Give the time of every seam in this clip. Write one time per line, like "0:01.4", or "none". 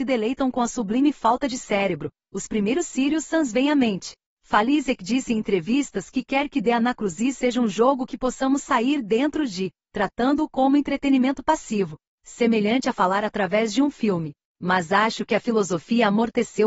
none